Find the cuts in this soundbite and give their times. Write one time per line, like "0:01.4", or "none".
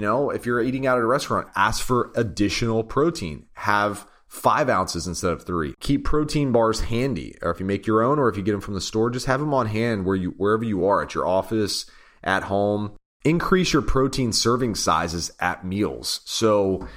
0:05.8